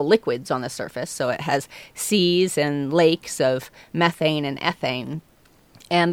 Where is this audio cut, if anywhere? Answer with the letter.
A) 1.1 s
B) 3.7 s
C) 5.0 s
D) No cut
D